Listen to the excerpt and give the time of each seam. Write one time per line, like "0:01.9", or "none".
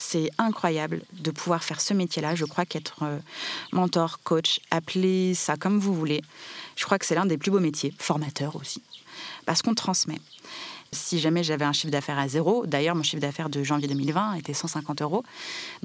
0:10.9